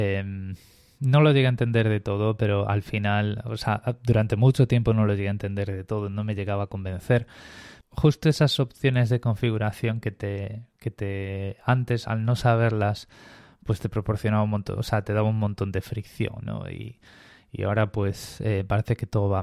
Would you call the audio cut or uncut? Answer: cut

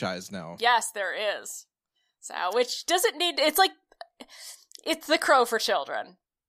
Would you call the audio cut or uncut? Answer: uncut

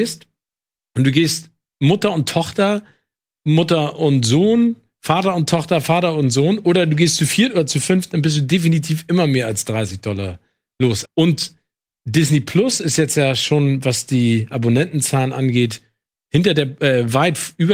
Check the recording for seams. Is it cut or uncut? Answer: cut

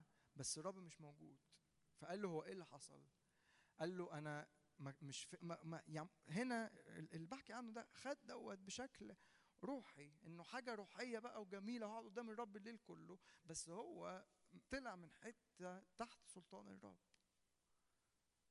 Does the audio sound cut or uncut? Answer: cut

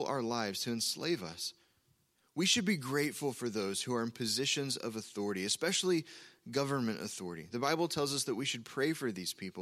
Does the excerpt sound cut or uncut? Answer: uncut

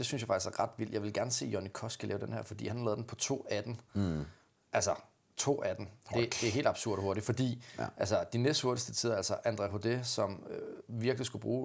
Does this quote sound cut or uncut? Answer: uncut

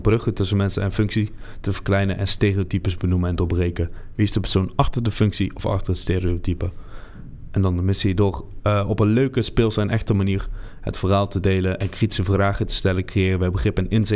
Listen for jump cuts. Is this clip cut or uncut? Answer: uncut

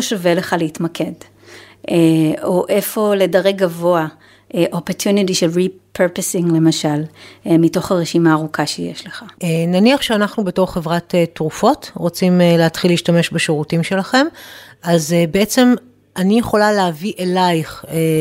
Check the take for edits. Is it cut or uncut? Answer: cut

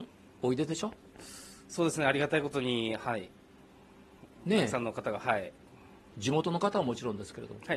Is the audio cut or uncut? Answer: uncut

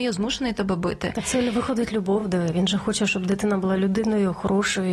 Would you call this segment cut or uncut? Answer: uncut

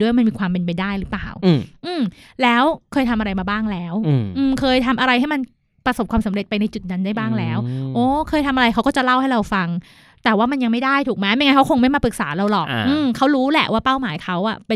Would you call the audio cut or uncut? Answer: uncut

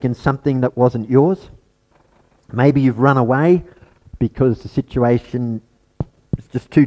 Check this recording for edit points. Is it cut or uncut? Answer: uncut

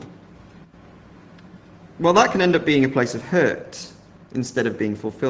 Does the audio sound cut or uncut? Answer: cut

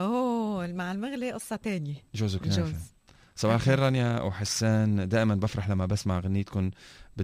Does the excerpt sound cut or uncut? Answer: uncut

